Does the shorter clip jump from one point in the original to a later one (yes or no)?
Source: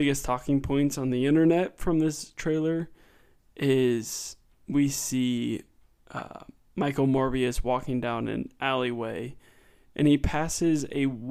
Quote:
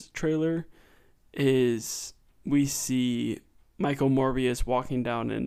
yes